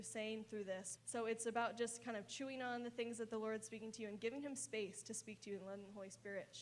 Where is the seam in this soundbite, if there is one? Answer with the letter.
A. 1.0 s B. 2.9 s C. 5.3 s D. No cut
A